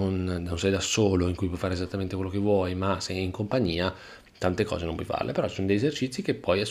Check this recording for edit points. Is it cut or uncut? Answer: uncut